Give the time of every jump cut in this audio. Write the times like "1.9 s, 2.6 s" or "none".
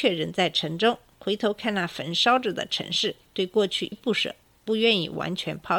3.9 s